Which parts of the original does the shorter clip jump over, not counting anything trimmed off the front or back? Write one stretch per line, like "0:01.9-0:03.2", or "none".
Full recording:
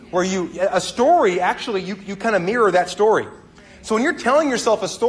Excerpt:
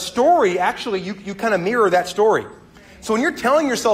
none